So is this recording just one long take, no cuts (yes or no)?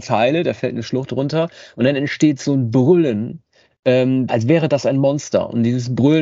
no